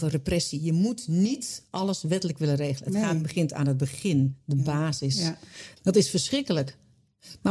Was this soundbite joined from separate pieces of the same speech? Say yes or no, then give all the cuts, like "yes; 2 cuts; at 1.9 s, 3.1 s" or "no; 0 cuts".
yes; 1 cut; at 5.8 s